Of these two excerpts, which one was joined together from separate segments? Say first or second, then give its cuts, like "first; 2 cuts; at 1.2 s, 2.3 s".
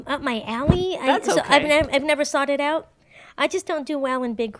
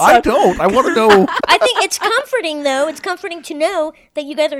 second; 1 cut; at 1.4 s